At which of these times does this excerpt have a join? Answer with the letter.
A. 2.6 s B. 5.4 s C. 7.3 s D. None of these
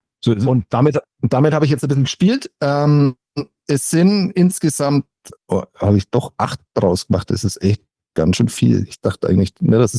B